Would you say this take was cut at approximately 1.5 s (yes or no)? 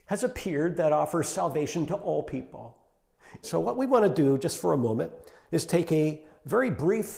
no